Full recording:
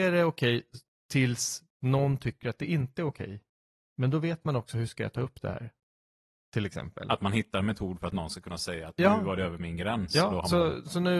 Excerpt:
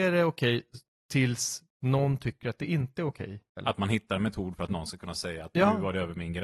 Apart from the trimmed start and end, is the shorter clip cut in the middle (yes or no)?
yes